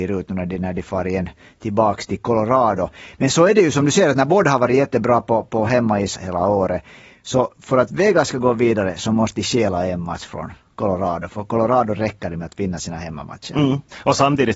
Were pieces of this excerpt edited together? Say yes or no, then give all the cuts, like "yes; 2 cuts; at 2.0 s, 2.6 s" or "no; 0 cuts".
yes; 1 cut; at 6.1 s